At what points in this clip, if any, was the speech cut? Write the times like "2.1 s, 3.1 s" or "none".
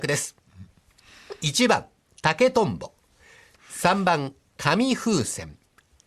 3.5 s